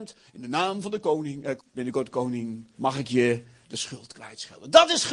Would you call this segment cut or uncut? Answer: cut